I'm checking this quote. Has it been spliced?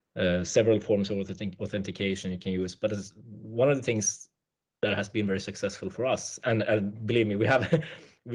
no; 0 cuts

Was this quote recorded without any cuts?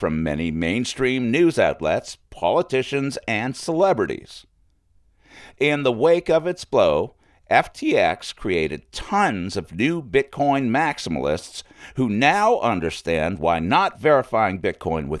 yes; 0 cuts

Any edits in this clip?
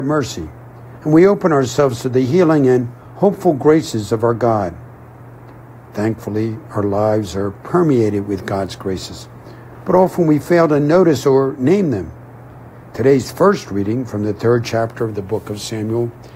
no; 0 cuts

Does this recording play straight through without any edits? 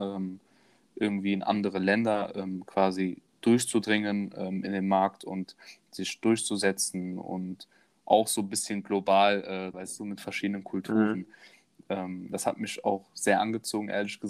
no; 1 cut; at 9.7 s

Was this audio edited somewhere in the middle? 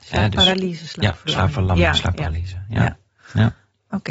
no; 0 cuts

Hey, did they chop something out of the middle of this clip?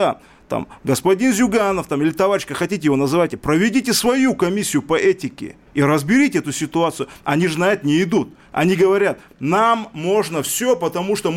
yes; 1 cut; at 5.7 s

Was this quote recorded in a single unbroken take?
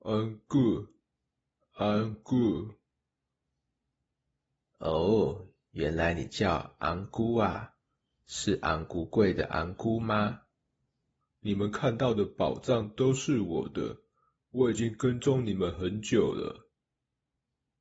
no; 1 cut; at 11.2 s

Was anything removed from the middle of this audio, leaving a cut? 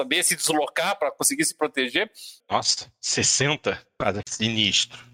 yes; 2 cuts; at 2.4 s, 4.2 s

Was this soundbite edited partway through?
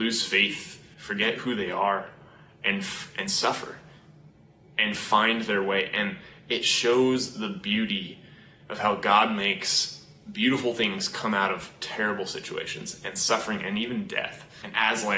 yes; 1 cut; at 0.9 s

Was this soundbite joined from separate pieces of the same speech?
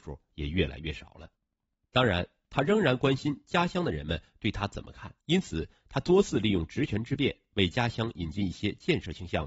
yes; 1 cut; at 5.2 s

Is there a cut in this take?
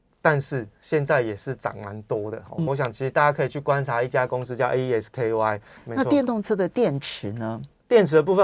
yes; 2 cuts; at 2.7 s, 5.8 s

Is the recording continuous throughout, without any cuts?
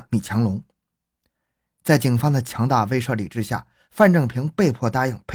yes; 0 cuts

